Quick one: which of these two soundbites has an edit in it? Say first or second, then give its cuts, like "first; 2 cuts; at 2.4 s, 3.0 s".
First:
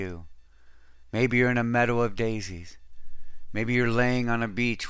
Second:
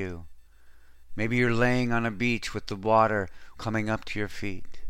second; 2 cuts; at 1.1 s, 3.5 s